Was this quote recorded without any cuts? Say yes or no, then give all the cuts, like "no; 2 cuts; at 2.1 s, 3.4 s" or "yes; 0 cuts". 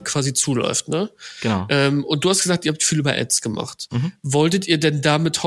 yes; 0 cuts